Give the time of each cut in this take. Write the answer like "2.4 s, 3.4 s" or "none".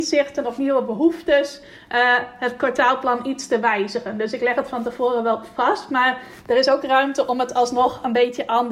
none

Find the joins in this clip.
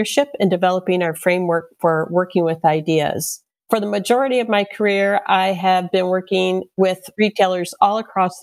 none

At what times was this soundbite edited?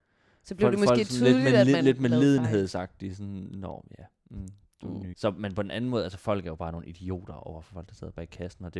5.1 s

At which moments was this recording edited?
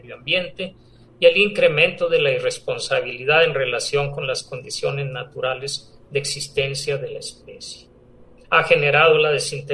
8.4 s

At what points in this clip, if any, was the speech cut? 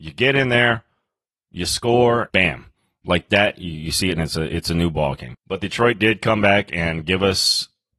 2.3 s, 5.3 s

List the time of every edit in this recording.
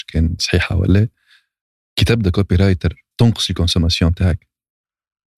3.1 s

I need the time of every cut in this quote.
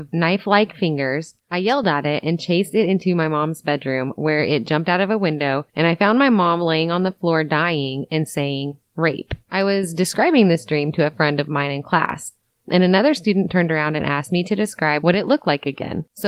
none

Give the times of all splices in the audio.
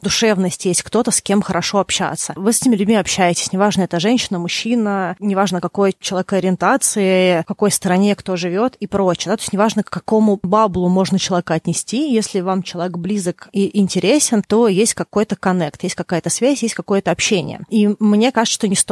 none

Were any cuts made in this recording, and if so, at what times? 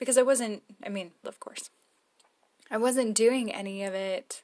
1.2 s

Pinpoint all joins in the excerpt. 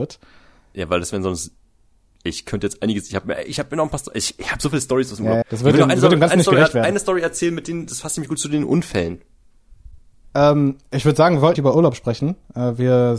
5.4 s, 10.2 s, 11.5 s

